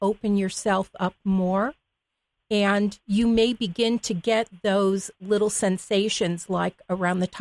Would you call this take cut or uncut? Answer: uncut